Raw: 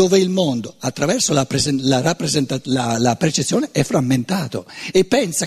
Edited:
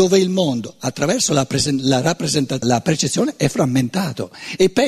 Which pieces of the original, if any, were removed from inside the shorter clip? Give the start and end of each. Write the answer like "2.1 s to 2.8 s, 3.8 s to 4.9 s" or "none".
2.6 s to 3.0 s